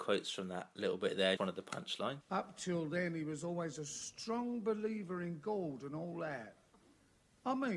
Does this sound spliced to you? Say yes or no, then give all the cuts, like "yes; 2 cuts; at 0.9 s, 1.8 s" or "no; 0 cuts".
yes; 1 cut; at 1.4 s